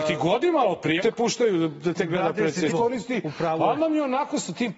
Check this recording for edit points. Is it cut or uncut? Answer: cut